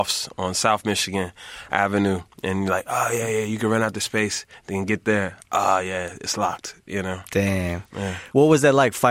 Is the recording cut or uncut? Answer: uncut